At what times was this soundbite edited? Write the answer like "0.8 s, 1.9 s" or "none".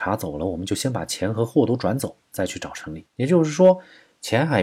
3.0 s